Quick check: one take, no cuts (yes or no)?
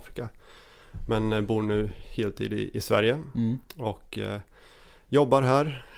yes